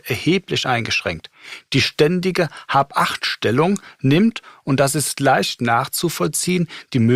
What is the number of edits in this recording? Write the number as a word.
zero